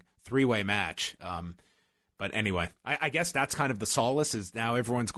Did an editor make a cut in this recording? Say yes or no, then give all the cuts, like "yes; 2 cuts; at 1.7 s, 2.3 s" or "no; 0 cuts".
no; 0 cuts